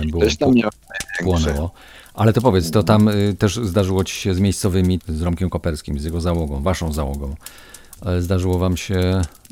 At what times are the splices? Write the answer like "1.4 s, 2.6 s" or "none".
5.0 s